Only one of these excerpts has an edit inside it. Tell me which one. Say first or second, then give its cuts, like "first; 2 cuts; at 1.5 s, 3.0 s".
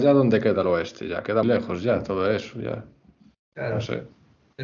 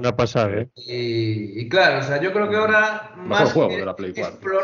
first; 1 cut; at 1.4 s